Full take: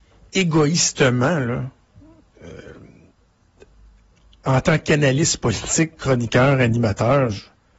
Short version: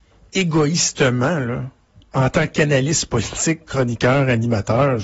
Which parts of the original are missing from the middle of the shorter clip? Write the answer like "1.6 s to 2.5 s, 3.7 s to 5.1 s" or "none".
2.0 s to 4.3 s